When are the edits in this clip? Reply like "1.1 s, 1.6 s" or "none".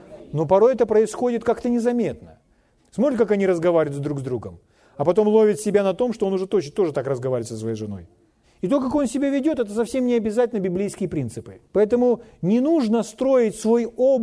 2.8 s, 8.4 s, 11.7 s